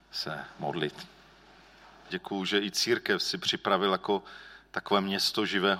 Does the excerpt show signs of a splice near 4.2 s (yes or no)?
no